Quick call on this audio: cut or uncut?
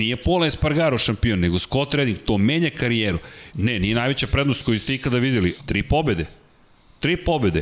cut